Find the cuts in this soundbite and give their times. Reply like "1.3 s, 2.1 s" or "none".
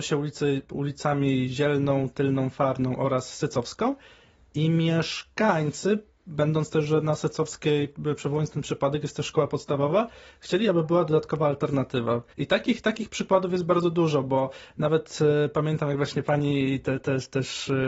12.3 s